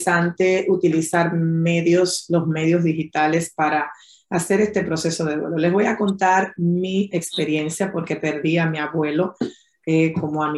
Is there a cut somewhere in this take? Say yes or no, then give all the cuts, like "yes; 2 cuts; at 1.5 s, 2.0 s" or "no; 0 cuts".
no; 0 cuts